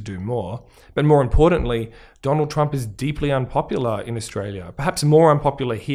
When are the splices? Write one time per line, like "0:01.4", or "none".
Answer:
none